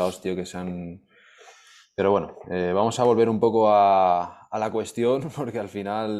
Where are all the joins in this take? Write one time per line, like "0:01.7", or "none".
none